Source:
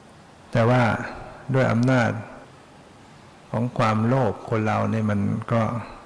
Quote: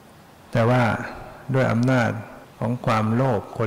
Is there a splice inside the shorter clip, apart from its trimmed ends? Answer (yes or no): yes